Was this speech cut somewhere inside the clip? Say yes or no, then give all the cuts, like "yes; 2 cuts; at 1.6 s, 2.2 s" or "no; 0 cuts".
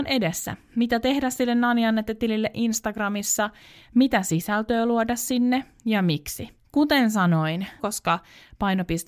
yes; 2 cuts; at 5.7 s, 7.8 s